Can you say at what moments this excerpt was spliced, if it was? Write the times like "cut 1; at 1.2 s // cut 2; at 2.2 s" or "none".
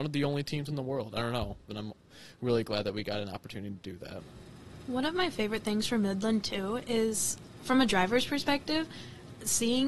cut 1; at 1.7 s